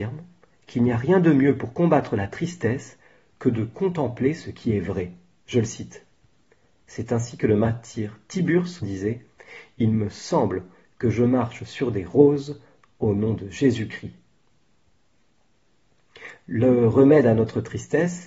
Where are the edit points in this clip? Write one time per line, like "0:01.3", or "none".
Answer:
0:06.8
0:08.8